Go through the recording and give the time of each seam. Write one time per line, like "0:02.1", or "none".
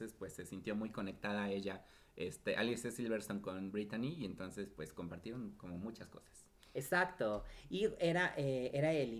none